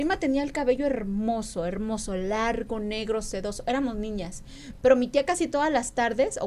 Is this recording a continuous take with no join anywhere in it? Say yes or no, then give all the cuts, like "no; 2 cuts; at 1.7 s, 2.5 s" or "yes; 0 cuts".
yes; 0 cuts